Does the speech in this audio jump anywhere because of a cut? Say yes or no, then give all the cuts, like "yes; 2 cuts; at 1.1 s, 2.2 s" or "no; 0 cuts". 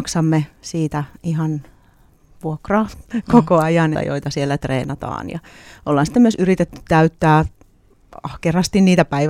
yes; 1 cut; at 3.9 s